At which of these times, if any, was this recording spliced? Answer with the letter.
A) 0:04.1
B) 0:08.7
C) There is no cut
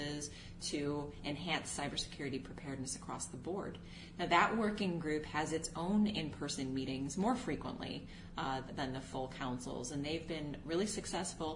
B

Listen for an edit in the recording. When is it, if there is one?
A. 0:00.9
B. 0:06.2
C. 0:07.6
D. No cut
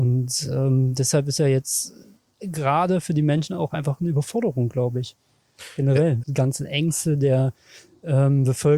B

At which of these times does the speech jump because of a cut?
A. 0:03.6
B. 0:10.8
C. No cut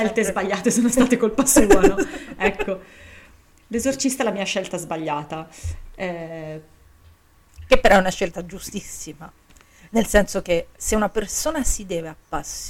B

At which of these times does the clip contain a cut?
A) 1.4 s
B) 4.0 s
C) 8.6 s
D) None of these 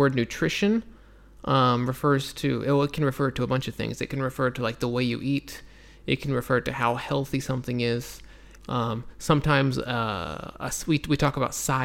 C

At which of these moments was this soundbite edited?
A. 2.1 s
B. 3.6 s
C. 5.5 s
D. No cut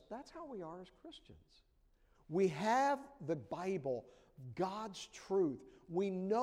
A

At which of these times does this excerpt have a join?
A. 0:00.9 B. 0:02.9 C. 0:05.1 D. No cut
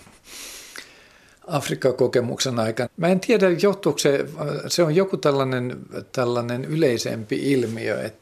B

